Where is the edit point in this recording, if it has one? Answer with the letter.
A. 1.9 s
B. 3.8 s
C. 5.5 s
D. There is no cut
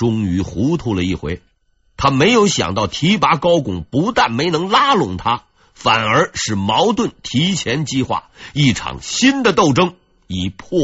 D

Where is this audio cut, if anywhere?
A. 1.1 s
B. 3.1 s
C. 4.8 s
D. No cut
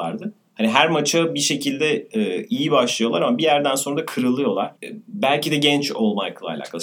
C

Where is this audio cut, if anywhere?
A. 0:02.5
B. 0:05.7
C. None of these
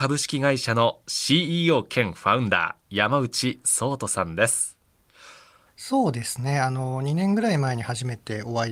B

